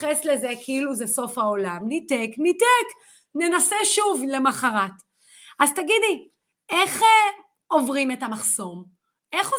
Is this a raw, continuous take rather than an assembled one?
yes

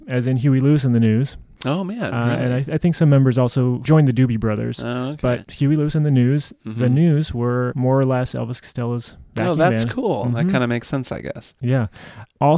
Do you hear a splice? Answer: no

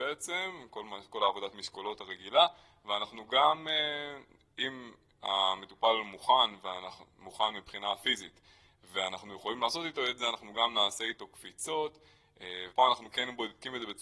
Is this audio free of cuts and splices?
no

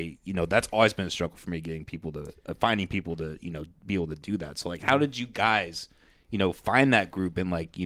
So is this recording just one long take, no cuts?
yes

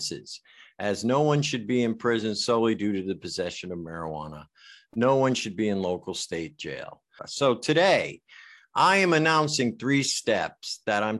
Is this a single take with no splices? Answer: no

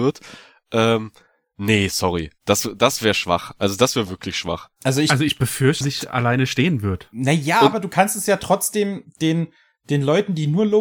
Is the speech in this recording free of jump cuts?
no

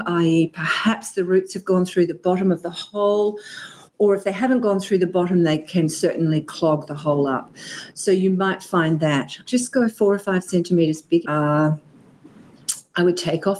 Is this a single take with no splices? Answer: no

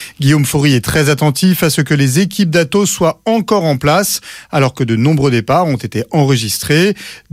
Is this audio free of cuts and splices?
yes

